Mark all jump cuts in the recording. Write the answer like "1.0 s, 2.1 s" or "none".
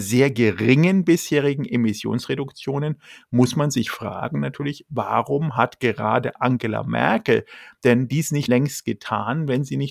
8.5 s

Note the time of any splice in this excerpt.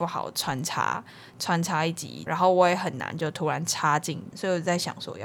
2.3 s, 4.3 s

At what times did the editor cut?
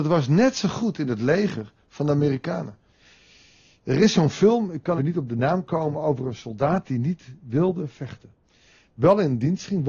5.0 s

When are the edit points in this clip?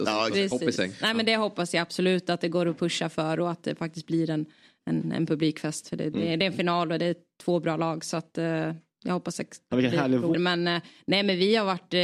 10.3 s

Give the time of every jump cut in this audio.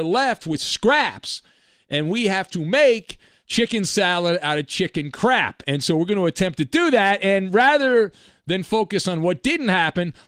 none

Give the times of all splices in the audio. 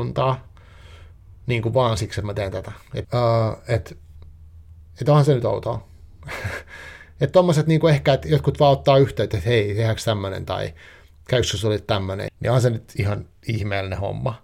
3.0 s, 12.3 s

